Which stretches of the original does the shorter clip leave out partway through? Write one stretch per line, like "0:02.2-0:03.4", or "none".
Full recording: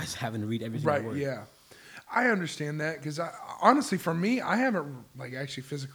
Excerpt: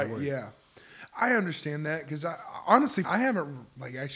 0:04.0-0:04.4